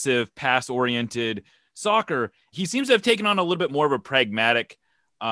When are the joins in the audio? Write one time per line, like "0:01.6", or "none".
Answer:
0:02.5